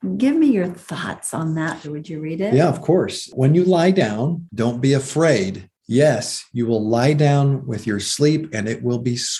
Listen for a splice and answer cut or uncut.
cut